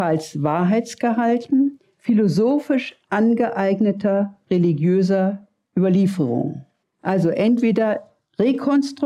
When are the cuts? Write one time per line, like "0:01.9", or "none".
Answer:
0:06.8